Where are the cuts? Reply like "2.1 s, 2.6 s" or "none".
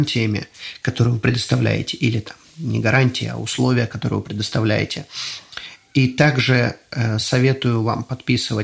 none